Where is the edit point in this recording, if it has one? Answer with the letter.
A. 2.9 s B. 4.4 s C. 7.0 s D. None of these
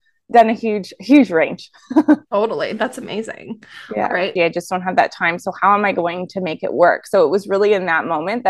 B